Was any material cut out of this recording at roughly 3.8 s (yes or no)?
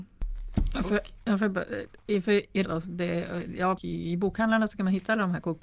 yes